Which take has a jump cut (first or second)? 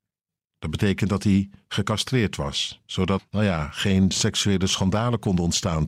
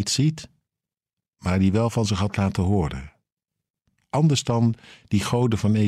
first